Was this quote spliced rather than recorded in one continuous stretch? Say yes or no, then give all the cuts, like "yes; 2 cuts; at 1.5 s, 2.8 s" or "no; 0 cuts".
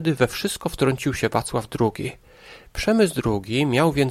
yes; 1 cut; at 2.7 s